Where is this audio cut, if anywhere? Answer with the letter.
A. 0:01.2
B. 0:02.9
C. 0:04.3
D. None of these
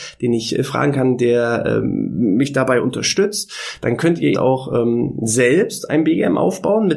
C